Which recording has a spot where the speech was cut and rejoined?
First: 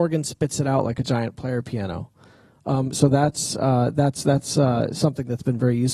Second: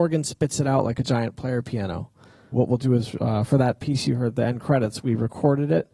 second; 1 cut; at 2.5 s

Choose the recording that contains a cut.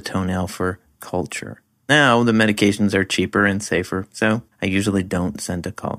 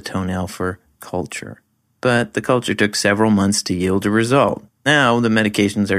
first; 2 cuts; at 1.8 s, 4.5 s

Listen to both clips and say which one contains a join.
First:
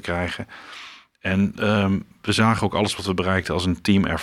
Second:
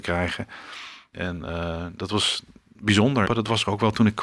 second; 2 cuts; at 1.1 s, 3.2 s

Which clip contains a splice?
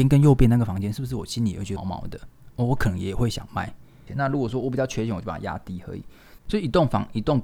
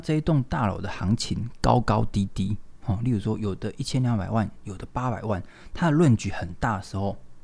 first; 3 cuts; at 1.8 s, 4.1 s, 6.4 s

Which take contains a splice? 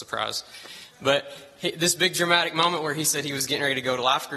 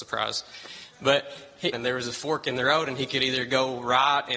second; 1 cut; at 1.7 s

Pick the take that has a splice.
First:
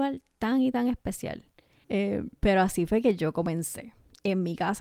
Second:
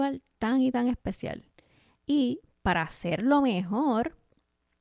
first; 1 cut; at 1.8 s

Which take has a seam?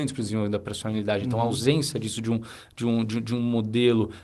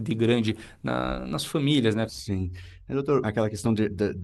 second; 2 cuts; at 2.1 s, 3.2 s

